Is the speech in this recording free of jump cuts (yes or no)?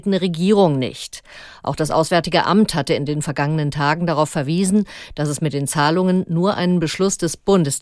yes